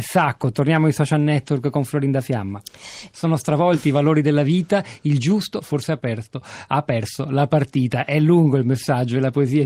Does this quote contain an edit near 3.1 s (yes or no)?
yes